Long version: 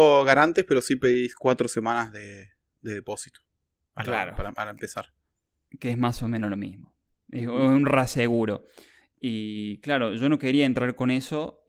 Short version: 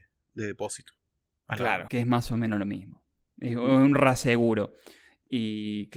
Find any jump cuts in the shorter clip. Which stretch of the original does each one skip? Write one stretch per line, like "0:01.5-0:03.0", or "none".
0:04.4-0:05.8